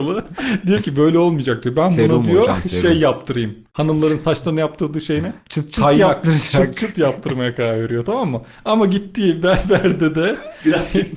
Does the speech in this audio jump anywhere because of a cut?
no; 0 cuts

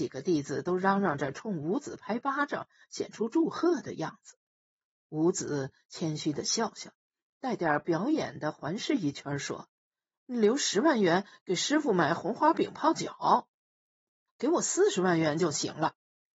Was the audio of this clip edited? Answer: yes; 1 cut; at 14.3 s

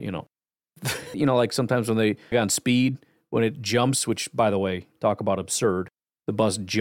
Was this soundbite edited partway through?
yes; 2 cuts; at 1.1 s, 2.3 s

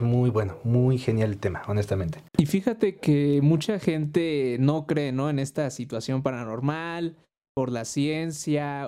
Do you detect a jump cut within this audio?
yes; 1 cut; at 2.3 s

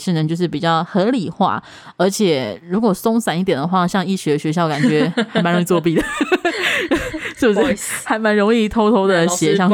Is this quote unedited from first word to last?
yes; 0 cuts

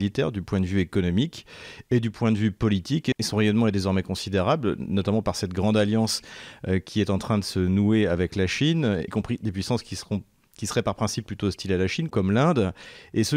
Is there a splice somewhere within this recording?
yes; 1 cut; at 9.1 s

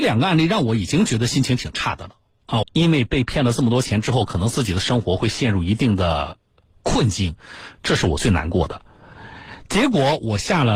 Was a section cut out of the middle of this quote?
yes; 1 cut; at 2.6 s

